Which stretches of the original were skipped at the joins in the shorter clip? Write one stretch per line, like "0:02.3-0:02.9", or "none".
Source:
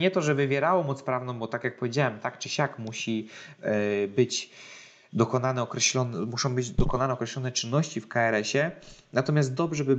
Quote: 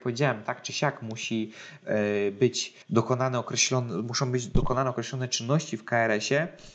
0:04.6-0:05.1